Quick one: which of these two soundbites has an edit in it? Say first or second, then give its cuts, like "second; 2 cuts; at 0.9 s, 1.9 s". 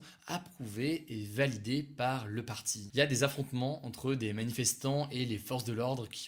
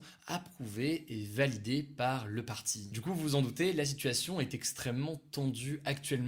first; 1 cut; at 2.9 s